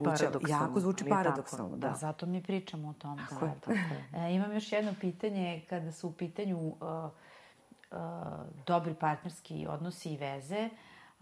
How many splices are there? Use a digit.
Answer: 0